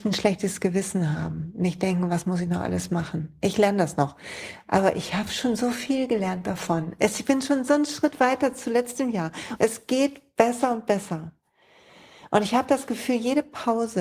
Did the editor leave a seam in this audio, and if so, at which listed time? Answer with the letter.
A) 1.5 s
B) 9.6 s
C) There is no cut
B